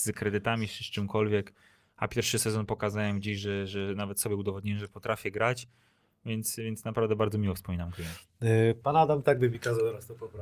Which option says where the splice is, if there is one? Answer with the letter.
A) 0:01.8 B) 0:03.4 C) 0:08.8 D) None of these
C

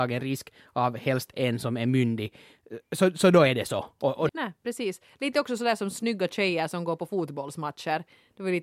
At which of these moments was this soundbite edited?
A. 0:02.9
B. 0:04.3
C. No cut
B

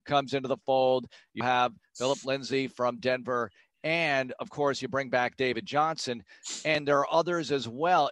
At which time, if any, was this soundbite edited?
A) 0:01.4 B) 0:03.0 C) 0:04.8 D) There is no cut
A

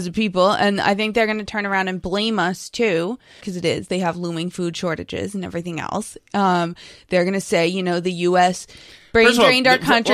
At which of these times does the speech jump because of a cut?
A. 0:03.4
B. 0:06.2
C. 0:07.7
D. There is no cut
A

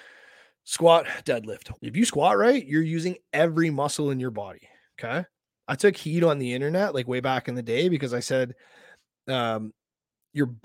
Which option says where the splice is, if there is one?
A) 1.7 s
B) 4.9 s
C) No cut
A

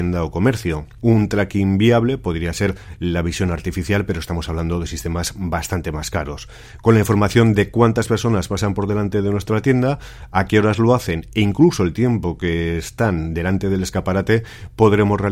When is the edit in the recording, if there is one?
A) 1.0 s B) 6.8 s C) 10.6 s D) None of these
A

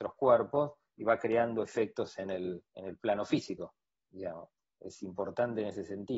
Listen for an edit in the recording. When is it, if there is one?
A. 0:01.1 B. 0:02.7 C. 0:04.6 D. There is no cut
B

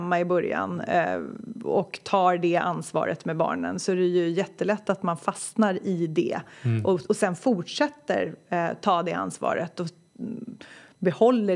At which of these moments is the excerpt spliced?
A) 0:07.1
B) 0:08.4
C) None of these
A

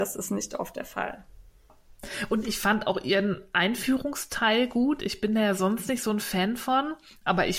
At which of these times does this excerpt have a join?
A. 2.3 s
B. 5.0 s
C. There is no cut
C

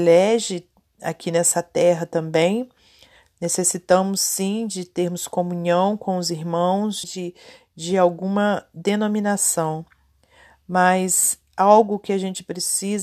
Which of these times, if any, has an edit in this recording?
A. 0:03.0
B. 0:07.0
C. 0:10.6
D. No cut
B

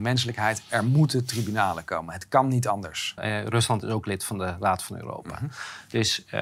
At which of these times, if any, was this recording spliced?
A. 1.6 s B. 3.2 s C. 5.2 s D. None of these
B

